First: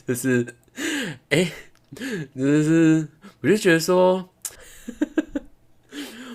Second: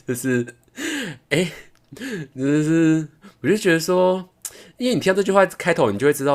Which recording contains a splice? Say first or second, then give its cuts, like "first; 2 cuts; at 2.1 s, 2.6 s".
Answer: first; 1 cut; at 4.5 s